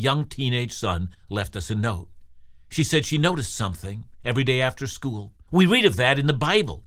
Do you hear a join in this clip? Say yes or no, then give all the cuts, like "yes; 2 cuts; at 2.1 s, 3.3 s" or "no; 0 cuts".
yes; 1 cut; at 5.5 s